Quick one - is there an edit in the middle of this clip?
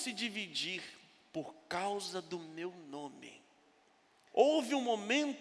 yes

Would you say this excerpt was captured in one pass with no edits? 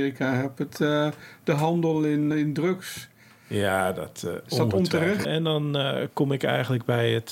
no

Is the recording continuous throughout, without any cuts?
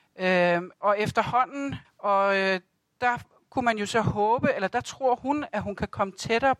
no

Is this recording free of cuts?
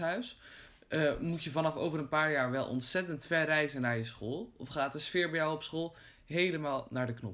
yes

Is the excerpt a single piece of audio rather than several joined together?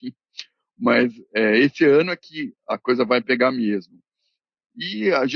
yes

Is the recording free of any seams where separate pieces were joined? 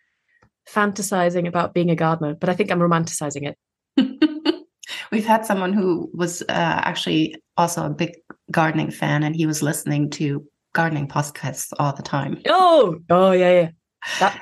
yes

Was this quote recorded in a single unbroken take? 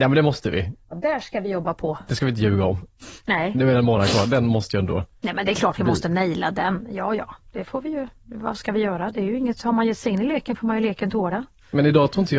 yes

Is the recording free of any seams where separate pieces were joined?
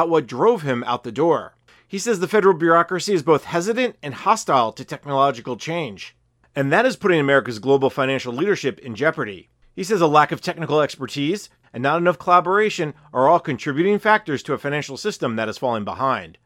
no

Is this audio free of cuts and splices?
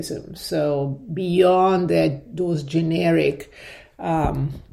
yes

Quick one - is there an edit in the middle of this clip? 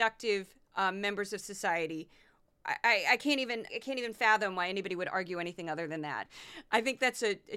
yes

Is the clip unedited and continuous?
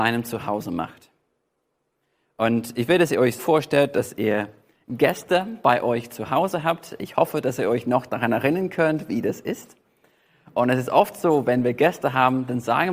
no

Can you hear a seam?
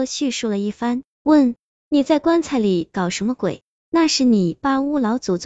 yes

